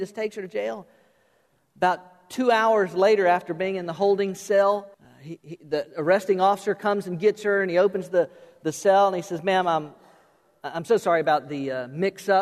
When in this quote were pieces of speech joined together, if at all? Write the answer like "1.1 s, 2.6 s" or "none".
4.9 s